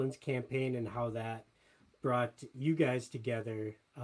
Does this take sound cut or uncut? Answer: uncut